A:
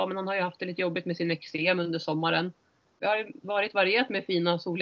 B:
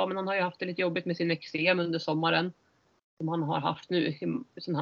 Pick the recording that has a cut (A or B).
A